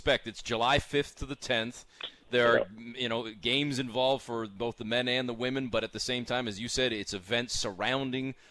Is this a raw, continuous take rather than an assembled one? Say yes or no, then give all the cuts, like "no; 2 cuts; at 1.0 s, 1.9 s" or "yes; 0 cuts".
yes; 0 cuts